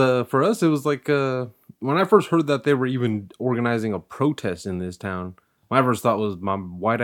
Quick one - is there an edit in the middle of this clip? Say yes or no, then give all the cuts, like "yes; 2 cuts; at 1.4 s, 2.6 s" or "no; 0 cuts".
no; 0 cuts